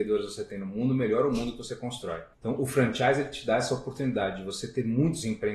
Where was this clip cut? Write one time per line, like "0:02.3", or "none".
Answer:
0:02.3